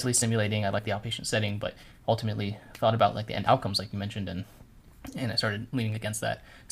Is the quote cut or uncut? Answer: uncut